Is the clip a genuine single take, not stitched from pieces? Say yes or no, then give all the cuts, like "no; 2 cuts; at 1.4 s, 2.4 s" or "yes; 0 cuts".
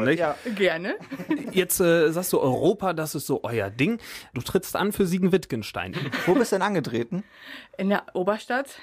no; 2 cuts; at 4.3 s, 5.9 s